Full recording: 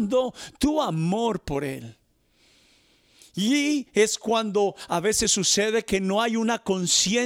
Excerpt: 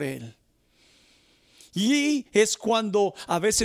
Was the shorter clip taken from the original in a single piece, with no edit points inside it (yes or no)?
yes